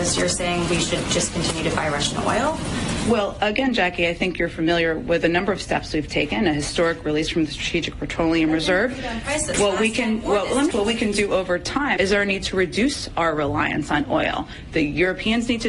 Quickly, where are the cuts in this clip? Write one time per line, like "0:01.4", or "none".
0:10.7
0:12.0